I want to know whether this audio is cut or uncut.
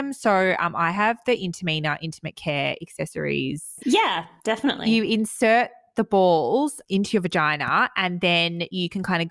cut